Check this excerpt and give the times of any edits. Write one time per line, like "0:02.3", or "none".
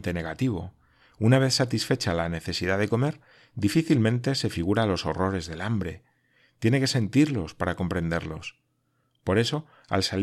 none

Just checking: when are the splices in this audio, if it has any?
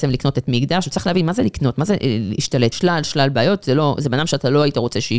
0:02.7

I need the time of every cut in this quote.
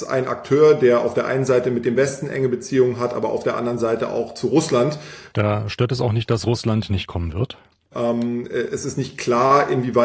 0:05.3
0:07.9

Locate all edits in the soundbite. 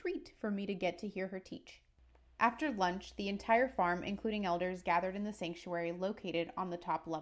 none

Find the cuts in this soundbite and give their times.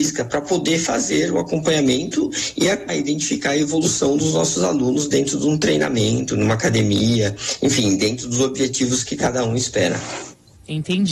0:02.9

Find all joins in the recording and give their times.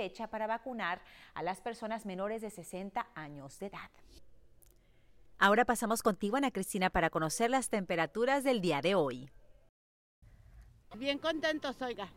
0:10.8

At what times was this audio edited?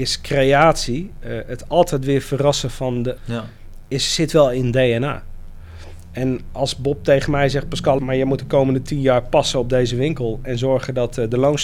0:03.2
0:08.0

